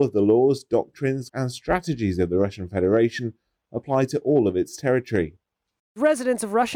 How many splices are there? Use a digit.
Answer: 1